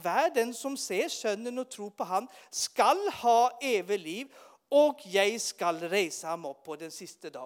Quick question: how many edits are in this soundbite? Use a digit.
0